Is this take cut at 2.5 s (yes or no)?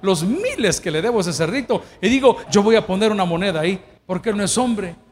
yes